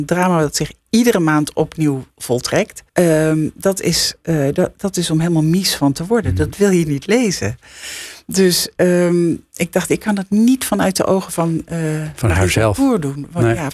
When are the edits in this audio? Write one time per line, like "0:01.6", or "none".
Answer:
0:02.9